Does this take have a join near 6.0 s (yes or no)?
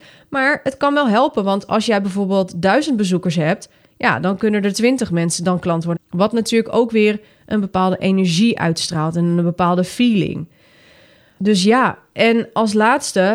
yes